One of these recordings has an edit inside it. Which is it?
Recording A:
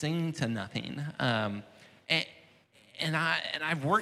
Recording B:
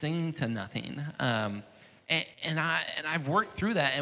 B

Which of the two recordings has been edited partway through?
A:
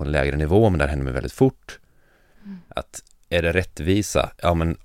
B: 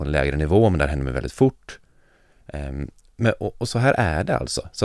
A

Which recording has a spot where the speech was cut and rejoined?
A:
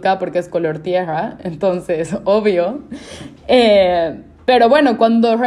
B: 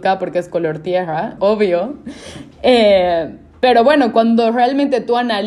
B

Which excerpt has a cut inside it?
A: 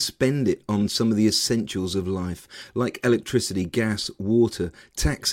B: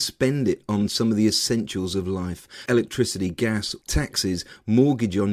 B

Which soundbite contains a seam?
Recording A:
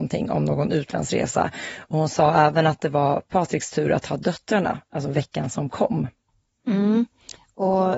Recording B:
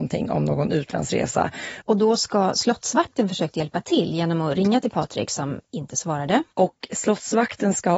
B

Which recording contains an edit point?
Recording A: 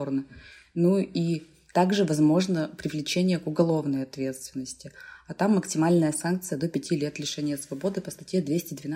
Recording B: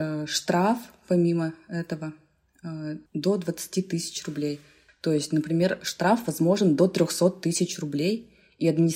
B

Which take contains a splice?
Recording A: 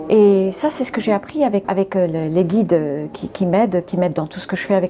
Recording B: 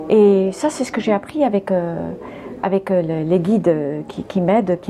A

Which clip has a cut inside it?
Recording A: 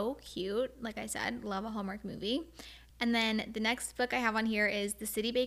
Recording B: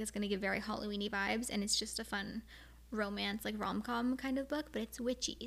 A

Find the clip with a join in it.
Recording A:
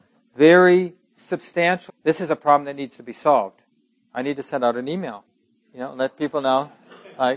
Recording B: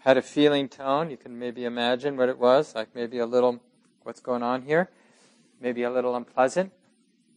A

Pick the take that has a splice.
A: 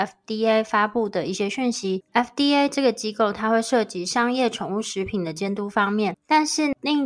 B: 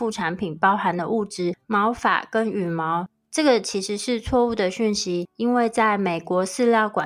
B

